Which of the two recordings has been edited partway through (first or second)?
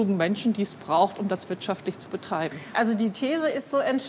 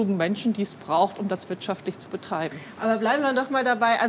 first